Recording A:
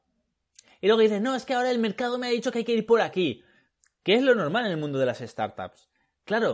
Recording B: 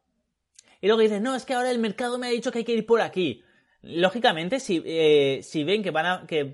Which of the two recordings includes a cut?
B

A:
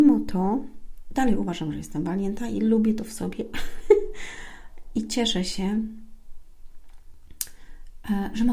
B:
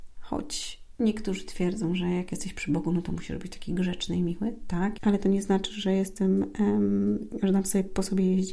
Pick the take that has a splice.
B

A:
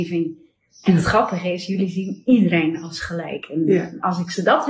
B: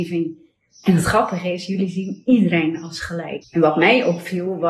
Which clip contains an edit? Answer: B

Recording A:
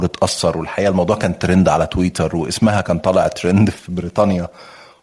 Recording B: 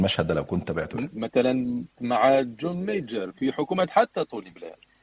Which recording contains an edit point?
B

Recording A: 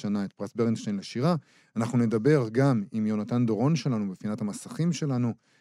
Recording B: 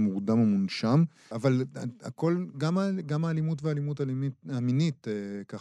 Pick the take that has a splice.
B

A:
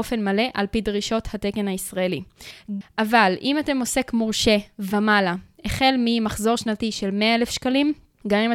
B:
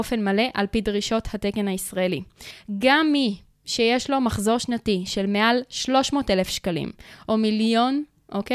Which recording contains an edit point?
A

